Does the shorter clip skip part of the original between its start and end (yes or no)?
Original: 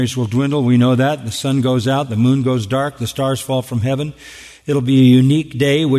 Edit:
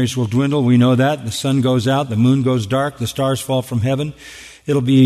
no